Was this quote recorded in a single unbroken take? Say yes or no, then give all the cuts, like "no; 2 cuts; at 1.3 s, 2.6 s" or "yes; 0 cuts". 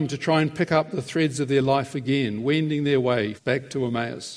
no; 1 cut; at 3.4 s